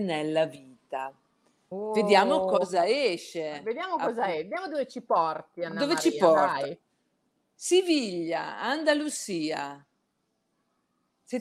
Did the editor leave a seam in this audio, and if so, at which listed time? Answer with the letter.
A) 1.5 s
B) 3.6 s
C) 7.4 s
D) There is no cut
D